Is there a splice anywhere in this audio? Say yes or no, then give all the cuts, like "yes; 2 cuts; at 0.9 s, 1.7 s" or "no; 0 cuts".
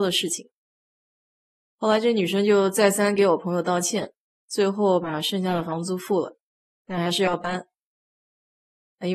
yes; 1 cut; at 1.6 s